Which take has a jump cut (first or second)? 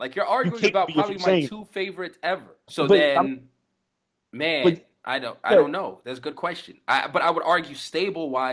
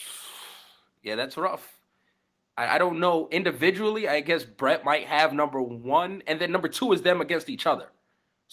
first